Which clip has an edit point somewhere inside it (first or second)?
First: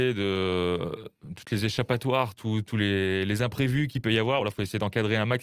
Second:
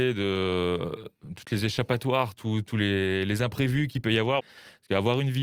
second